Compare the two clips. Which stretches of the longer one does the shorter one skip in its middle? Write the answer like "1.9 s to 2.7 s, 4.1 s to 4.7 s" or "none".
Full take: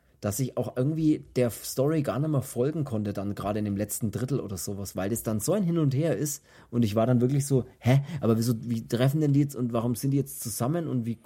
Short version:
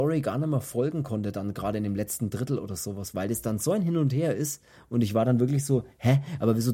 none